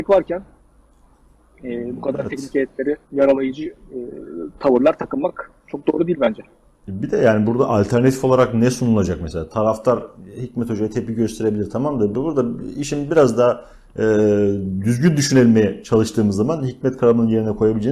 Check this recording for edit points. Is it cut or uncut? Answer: cut